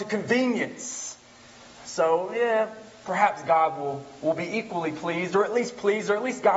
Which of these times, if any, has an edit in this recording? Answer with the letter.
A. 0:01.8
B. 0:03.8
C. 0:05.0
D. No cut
A